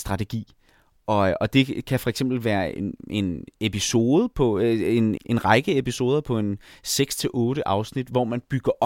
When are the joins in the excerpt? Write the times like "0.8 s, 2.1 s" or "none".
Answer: 5.2 s